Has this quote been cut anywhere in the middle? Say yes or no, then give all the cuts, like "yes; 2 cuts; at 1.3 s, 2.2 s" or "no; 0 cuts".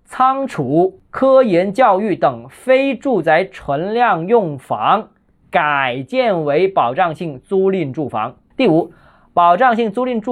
yes; 1 cut; at 8.5 s